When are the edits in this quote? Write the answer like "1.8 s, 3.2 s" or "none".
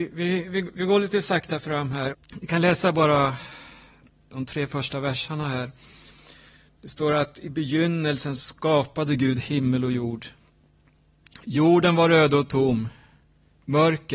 2.1 s